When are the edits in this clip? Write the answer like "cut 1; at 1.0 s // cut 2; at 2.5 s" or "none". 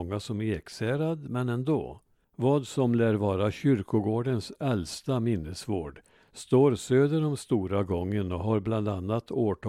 cut 1; at 2.2 s